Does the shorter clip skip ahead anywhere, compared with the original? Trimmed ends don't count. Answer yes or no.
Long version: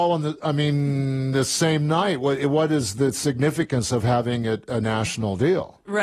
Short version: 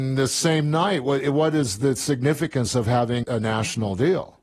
yes